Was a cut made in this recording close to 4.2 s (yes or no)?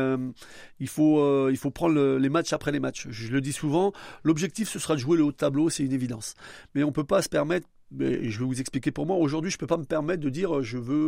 no